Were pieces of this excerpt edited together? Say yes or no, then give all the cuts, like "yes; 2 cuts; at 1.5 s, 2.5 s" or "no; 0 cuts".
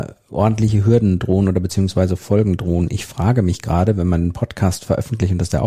no; 0 cuts